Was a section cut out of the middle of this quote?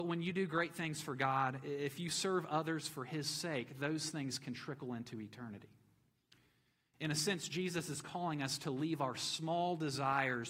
no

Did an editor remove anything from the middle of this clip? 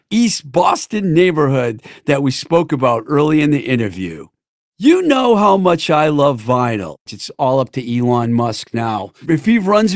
yes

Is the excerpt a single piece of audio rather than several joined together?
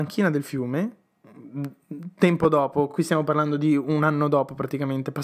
yes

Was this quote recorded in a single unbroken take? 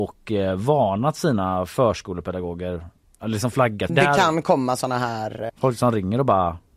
no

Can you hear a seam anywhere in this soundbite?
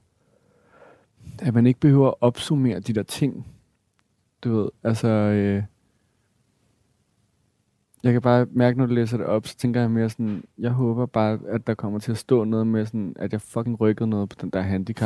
no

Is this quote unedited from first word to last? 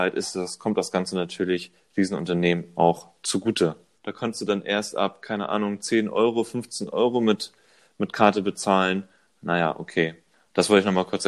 no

